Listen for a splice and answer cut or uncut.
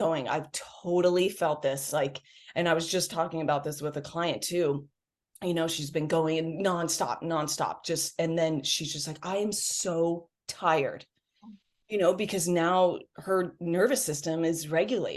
uncut